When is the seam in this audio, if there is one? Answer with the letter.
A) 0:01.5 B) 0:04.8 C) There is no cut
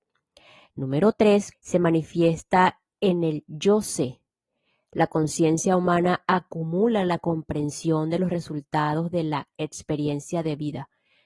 A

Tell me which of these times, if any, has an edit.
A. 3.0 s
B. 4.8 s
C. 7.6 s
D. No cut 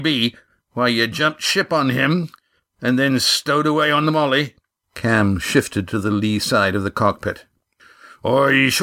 B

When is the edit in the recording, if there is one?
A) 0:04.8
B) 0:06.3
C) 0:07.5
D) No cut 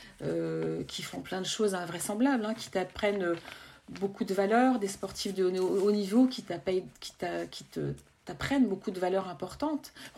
D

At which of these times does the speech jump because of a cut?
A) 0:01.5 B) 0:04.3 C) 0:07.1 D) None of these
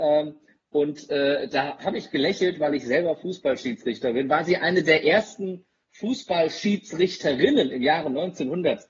D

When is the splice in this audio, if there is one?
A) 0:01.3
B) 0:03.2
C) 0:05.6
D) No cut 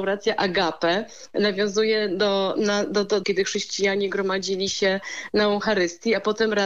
B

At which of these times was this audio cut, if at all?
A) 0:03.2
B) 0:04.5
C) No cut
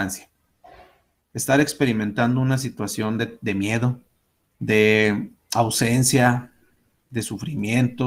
B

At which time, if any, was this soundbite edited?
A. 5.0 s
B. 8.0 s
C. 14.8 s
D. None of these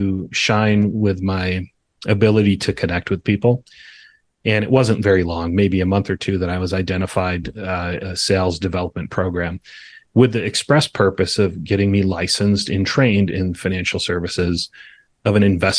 B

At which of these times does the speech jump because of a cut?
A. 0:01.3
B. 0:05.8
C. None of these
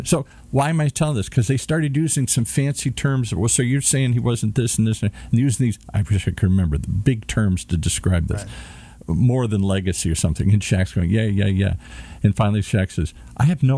C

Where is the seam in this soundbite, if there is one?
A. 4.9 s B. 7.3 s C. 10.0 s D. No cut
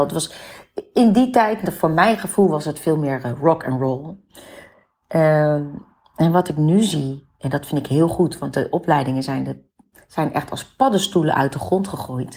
D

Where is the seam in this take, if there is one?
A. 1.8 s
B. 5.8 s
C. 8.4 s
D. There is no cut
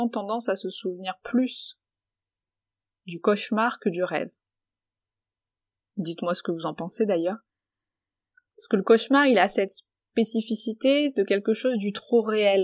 B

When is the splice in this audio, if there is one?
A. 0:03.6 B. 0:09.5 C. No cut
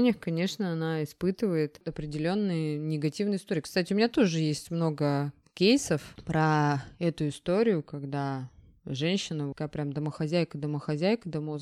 B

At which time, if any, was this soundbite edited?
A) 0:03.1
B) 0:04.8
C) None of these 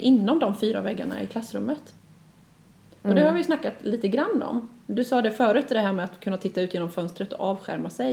C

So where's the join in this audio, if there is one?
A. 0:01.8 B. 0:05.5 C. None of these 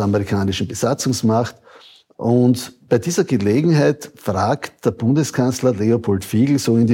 C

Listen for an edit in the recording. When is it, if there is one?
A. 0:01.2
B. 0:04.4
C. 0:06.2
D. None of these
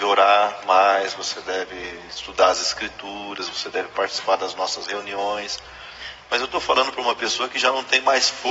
D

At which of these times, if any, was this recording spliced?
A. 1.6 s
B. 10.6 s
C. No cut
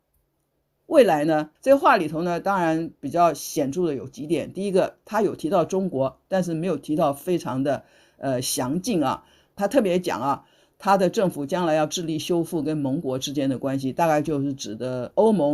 A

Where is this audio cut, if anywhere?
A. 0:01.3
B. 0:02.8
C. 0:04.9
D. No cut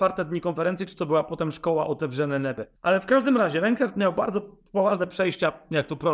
B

